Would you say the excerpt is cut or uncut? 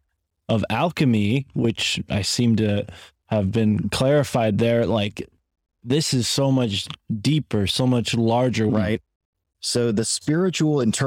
cut